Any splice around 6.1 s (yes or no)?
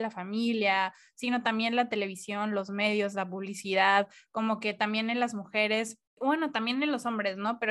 yes